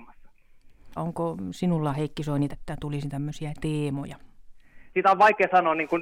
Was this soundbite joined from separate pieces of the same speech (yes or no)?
yes